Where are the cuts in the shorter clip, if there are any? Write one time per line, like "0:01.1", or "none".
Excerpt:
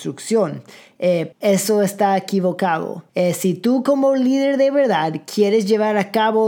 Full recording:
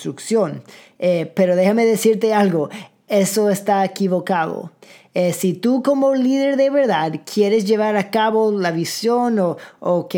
0:01.3
0:03.1